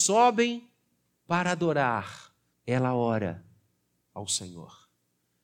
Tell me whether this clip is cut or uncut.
cut